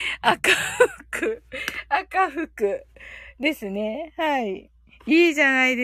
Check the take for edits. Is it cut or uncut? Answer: uncut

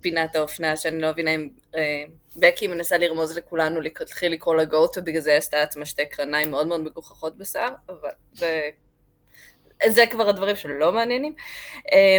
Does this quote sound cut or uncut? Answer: uncut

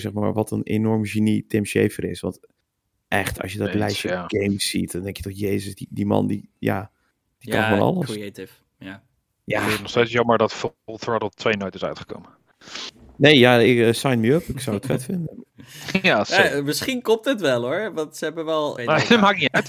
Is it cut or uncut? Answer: cut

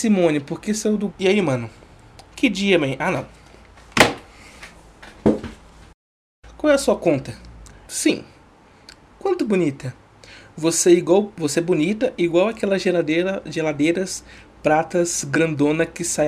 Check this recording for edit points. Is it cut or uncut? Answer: cut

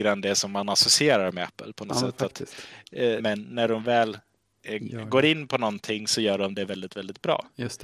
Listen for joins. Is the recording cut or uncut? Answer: cut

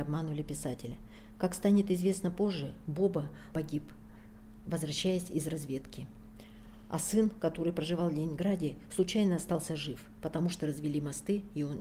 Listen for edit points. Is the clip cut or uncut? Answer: cut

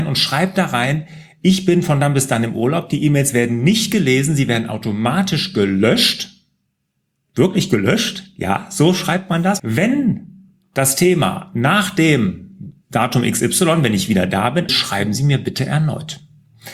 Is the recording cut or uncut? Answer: cut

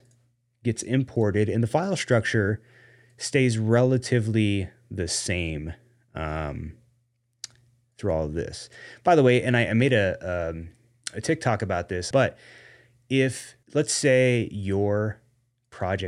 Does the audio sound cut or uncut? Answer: cut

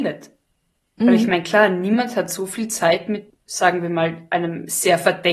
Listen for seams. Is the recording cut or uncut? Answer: uncut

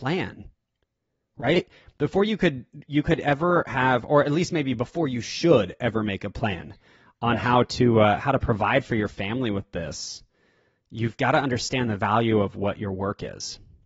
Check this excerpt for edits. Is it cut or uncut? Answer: uncut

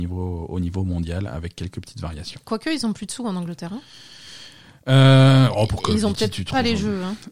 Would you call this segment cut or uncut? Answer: uncut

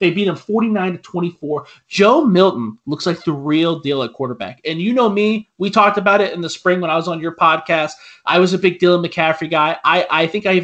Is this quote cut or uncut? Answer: uncut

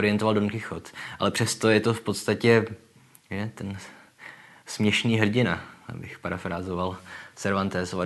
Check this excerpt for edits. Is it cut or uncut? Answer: uncut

